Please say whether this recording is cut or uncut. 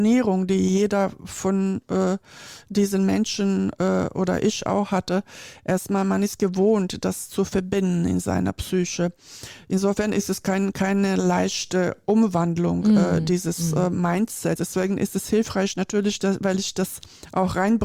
cut